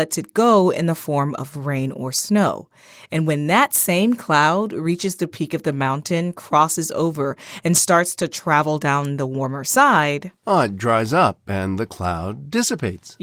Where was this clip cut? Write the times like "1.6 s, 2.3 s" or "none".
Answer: none